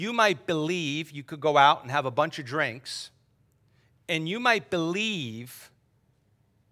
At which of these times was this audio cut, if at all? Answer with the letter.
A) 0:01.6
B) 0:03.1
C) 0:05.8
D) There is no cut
D